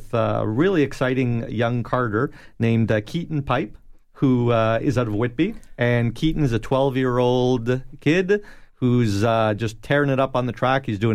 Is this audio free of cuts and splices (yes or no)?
no